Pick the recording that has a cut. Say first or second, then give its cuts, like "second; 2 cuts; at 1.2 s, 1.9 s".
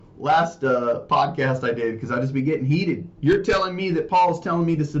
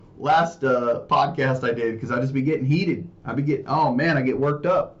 first; 1 cut; at 3.2 s